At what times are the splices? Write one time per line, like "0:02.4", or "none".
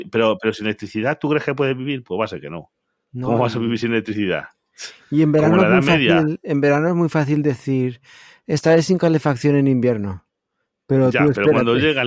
none